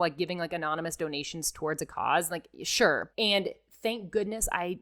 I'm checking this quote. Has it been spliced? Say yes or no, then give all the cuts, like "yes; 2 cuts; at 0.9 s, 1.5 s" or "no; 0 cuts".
yes; 1 cut; at 3.1 s